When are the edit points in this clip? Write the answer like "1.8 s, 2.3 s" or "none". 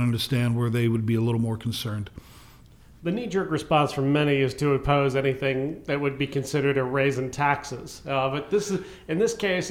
none